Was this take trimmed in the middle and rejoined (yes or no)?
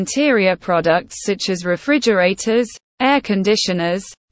no